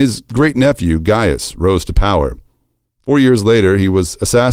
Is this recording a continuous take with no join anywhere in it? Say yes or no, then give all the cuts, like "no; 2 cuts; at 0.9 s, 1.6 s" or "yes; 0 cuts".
no; 1 cut; at 2.8 s